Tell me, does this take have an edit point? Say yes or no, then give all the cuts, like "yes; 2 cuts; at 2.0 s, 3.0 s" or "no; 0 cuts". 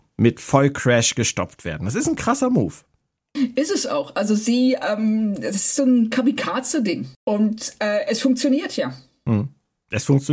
yes; 1 cut; at 7.1 s